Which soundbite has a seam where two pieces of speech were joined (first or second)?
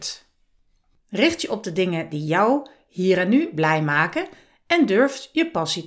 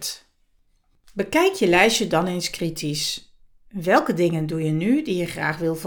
first